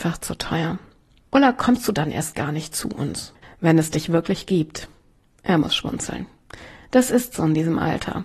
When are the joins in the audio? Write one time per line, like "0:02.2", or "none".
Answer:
0:01.3
0:03.4

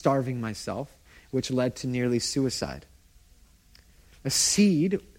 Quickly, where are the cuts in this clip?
none

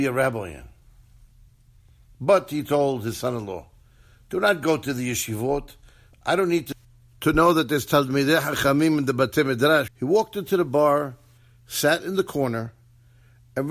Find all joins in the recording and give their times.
0:06.1
0:09.9

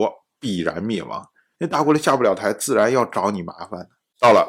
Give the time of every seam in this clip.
0:01.6

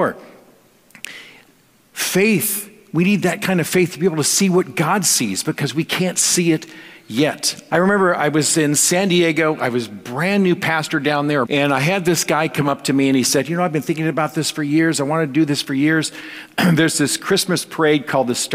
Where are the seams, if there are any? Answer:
0:07.7
0:11.5

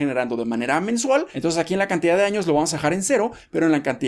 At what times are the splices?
0:01.3

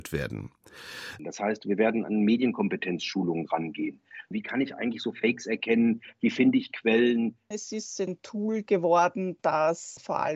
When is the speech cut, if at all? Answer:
0:01.2
0:07.5

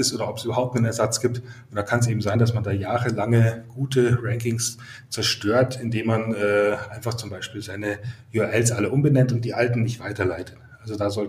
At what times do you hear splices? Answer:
none

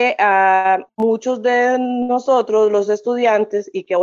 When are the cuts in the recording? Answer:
none

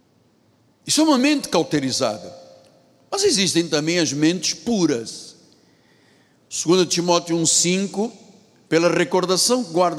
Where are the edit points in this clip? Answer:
none

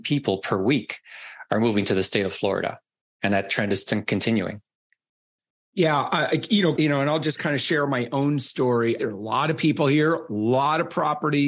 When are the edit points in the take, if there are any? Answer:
0:06.8
0:09.0

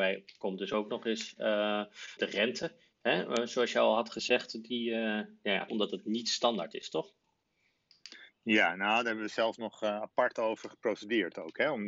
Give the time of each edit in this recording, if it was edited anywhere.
0:02.2
0:05.7

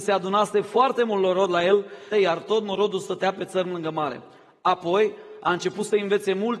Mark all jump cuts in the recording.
0:02.1

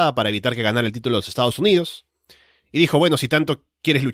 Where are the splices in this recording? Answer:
none

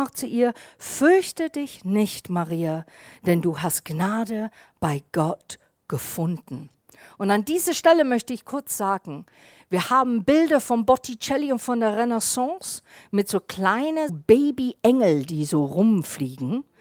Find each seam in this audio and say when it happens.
0:14.1

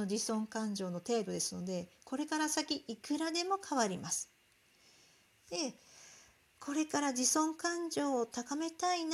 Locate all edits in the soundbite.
none

